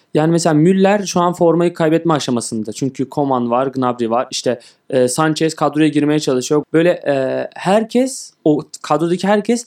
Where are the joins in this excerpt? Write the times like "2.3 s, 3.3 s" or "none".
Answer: 6.6 s